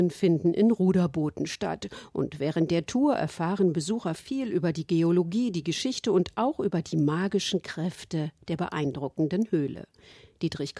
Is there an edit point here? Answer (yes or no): no